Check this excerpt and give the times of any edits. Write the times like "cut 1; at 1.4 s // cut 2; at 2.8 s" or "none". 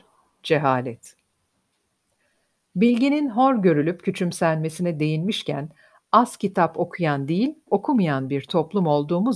none